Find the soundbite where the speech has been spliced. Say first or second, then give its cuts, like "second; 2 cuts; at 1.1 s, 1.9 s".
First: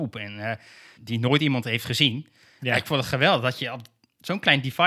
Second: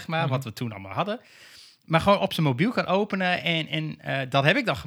first; 1 cut; at 1.0 s